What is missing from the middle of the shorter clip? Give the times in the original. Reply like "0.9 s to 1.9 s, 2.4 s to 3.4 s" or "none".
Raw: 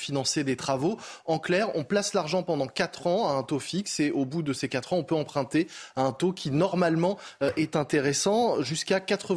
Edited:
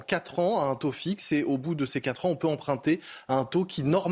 none